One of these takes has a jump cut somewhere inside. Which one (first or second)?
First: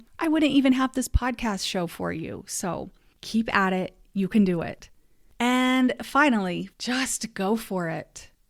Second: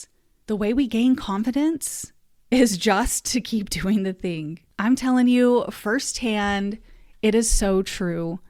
first